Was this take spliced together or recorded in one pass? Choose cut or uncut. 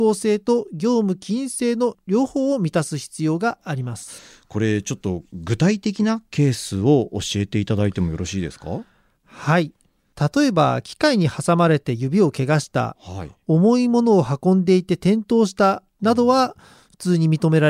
uncut